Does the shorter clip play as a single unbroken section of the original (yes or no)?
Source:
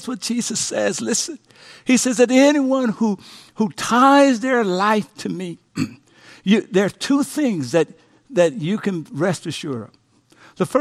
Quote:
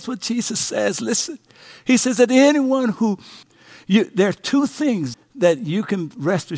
no